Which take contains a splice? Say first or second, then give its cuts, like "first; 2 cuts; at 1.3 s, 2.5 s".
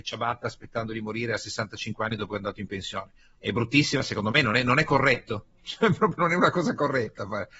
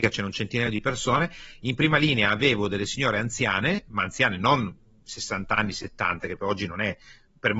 first; 1 cut; at 3.3 s